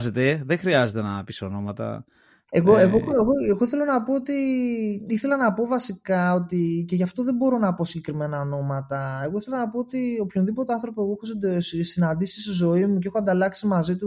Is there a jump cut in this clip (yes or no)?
no